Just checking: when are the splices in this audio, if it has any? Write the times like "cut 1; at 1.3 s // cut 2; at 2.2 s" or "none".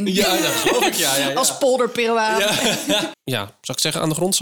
cut 1; at 3.1 s

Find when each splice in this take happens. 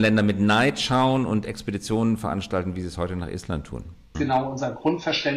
cut 1; at 4.1 s

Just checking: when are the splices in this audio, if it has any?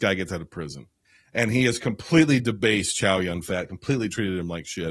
none

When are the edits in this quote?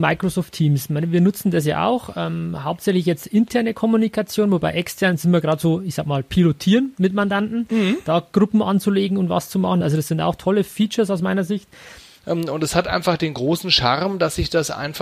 cut 1; at 9.8 s // cut 2; at 12.2 s

